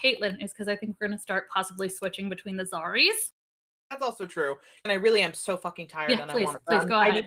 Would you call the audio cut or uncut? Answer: cut